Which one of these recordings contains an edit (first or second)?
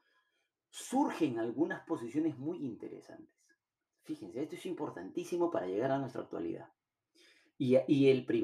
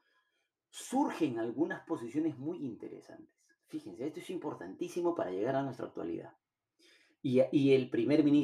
second